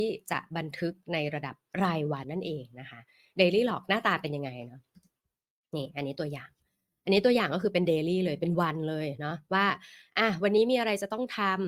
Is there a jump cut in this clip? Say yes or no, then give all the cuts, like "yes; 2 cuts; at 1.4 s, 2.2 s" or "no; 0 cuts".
yes; 1 cut; at 2.2 s